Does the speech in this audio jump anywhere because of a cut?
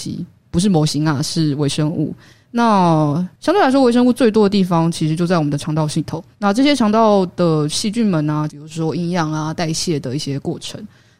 yes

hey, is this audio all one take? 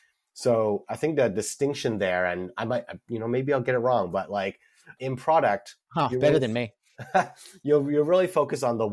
no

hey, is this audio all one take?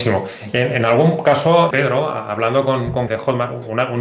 no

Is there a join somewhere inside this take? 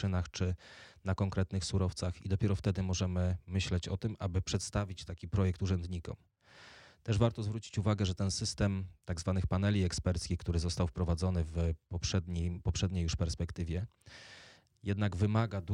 no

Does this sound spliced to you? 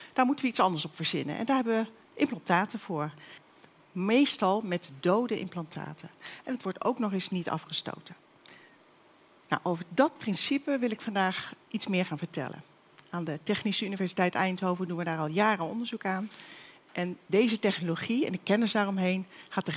yes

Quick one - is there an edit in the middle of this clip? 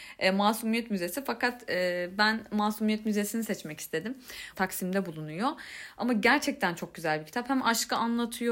yes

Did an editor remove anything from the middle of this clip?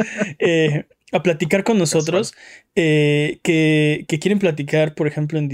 yes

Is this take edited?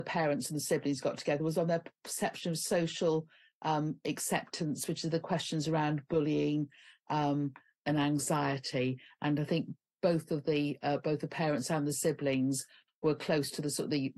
no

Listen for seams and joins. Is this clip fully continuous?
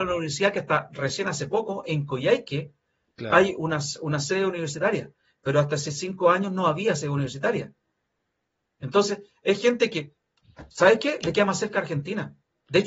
yes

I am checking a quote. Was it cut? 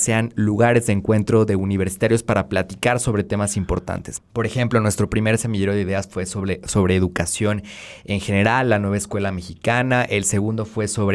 no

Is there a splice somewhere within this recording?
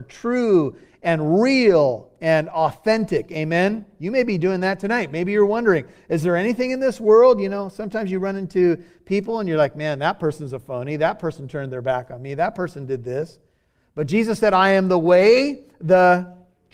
no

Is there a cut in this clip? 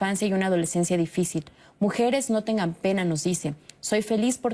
no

